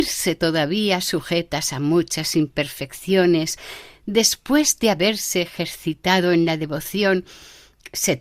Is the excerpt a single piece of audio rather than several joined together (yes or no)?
yes